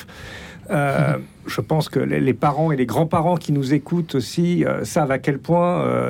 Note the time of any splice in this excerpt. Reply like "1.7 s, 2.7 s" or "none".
1.3 s